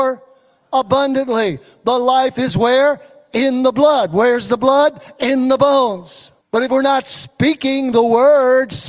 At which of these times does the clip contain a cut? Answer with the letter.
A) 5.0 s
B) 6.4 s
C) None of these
B